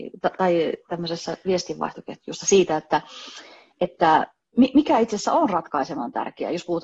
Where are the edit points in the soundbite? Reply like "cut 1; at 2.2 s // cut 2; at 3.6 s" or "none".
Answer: none